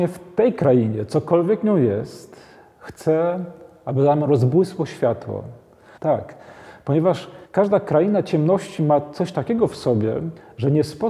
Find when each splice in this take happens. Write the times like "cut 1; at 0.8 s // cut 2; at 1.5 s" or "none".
cut 1; at 6.0 s // cut 2; at 7.4 s